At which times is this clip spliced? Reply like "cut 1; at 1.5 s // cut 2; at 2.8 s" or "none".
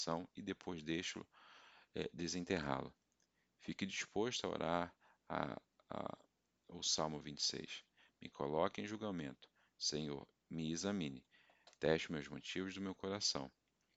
none